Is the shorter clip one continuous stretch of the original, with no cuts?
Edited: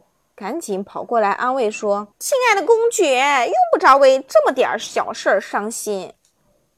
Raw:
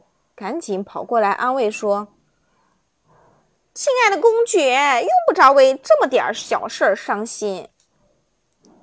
no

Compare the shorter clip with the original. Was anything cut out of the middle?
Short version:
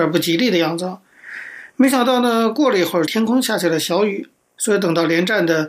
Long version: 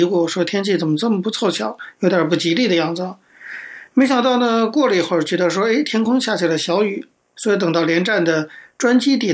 yes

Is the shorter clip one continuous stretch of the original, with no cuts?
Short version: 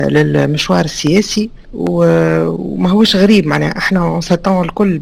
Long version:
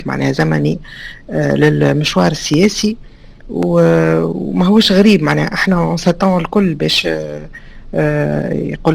no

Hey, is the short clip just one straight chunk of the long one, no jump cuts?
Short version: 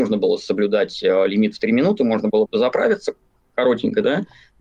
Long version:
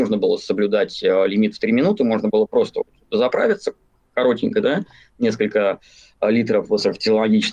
no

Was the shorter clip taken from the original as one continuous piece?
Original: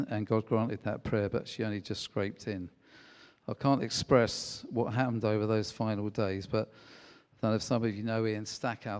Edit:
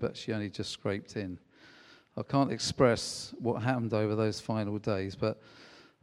yes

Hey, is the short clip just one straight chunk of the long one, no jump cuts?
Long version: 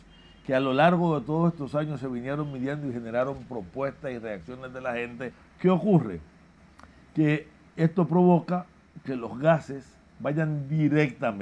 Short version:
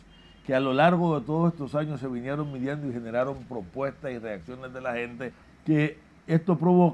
no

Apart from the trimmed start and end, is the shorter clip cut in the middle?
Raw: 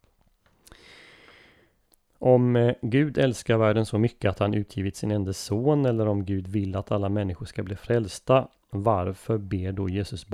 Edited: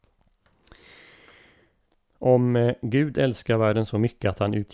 no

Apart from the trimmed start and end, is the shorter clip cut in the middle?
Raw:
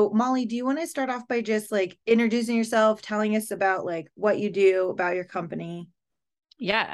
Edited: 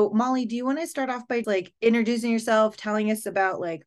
yes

